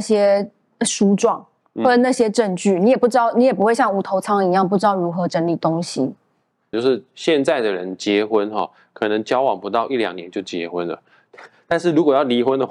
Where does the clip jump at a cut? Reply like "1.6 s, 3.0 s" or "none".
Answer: 6.7 s